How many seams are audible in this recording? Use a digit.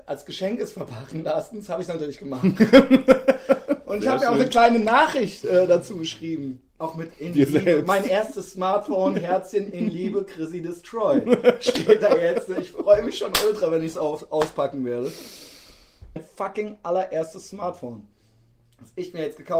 2